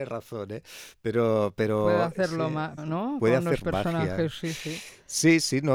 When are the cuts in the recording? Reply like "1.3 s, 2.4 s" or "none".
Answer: 2.8 s